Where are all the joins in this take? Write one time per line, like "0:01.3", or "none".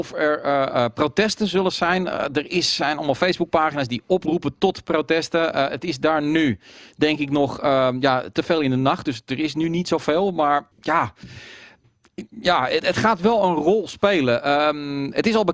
0:10.7